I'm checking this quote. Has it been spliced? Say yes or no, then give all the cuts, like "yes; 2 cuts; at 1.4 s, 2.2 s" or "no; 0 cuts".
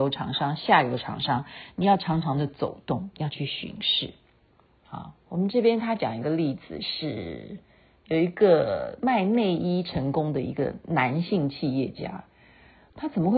no; 0 cuts